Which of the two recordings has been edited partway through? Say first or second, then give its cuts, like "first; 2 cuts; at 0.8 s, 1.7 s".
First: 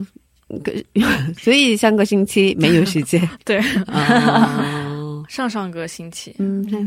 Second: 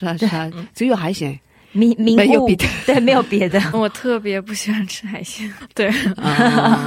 second; 2 cuts; at 3.7 s, 5.6 s